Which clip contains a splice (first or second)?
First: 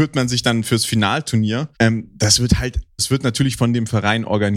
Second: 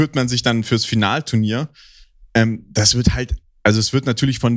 first